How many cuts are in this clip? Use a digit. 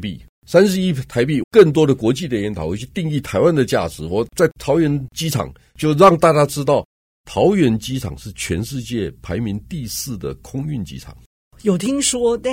1